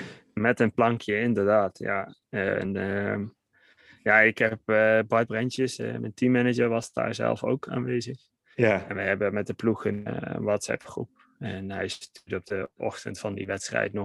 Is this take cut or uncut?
uncut